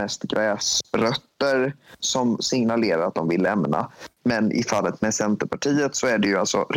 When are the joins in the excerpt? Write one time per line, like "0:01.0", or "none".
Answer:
0:02.0

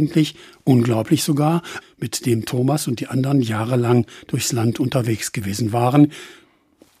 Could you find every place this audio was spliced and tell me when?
0:01.8

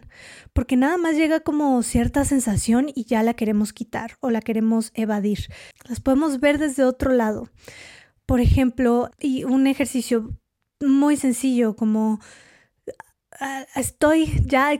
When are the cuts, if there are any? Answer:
0:05.7
0:09.1

